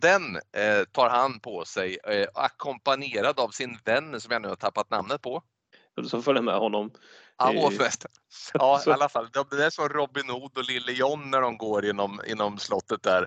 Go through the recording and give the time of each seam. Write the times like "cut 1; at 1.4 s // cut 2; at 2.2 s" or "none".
cut 1; at 6.0 s